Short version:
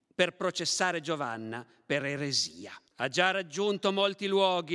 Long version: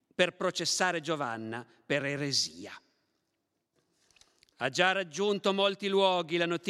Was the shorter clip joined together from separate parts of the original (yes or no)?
yes